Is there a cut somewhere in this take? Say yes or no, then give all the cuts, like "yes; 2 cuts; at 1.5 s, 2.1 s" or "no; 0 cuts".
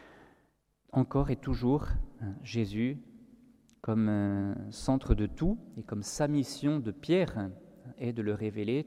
no; 0 cuts